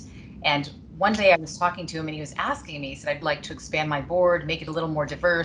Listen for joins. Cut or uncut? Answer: cut